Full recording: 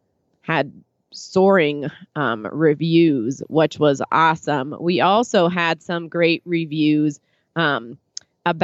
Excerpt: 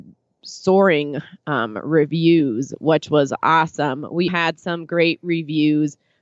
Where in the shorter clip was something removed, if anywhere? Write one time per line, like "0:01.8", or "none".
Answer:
0:04.3